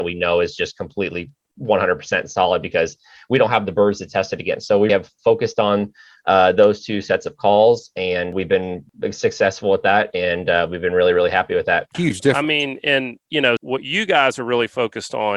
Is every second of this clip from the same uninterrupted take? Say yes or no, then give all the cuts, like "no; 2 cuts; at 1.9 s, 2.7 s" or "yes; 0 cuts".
no; 3 cuts; at 4.9 s, 11.9 s, 13.6 s